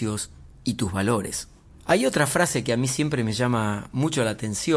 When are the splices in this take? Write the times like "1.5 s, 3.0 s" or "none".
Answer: none